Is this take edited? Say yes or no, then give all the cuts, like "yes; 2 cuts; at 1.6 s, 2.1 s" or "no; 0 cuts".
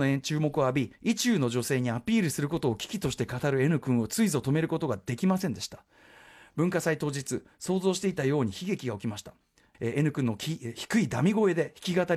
yes; 1 cut; at 9.7 s